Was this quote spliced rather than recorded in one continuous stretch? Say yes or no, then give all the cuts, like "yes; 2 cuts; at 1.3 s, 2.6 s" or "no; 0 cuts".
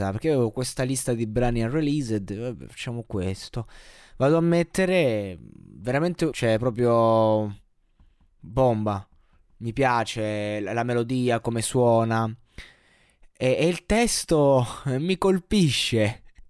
yes; 1 cut; at 6.3 s